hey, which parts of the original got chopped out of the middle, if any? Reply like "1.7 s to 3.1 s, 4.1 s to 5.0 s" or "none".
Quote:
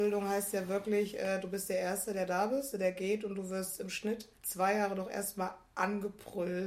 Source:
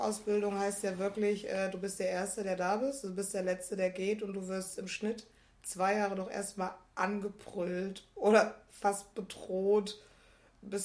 3.0 s to 3.7 s, 5.4 s to 5.6 s